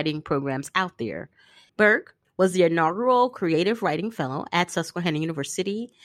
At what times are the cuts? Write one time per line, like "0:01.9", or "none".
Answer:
0:01.7